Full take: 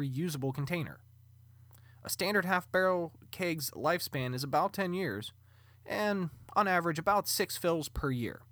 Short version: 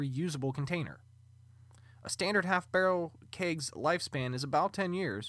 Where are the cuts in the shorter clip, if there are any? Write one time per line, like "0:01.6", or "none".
none